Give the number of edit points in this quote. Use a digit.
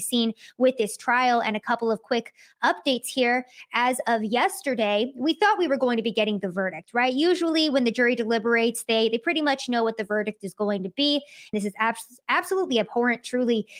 1